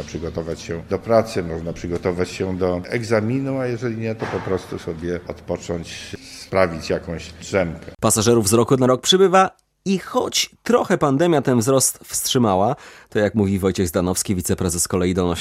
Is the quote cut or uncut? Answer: uncut